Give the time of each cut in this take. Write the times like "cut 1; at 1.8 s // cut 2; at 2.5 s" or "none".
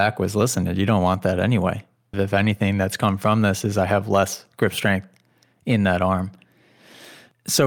cut 1; at 2.1 s

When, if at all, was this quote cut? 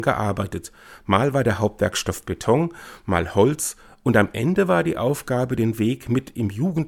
none

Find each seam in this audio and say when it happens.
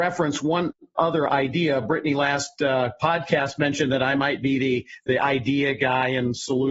none

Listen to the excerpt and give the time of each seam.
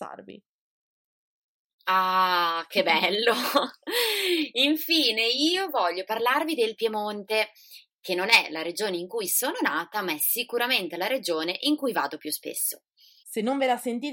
cut 1; at 13.2 s

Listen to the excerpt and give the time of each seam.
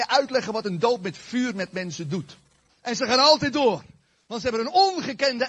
cut 1; at 2.7 s

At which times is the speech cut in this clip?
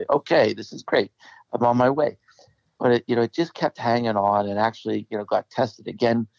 none

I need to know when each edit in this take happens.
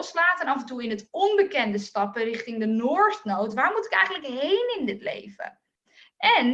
none

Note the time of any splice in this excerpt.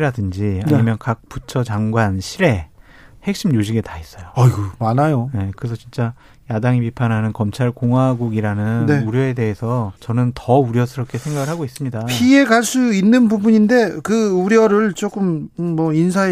cut 1; at 9.9 s

